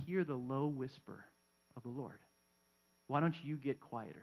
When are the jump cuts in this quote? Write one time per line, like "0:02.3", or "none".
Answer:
0:02.9